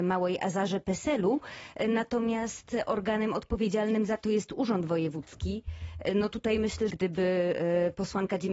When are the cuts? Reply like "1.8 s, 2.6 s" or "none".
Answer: 6.9 s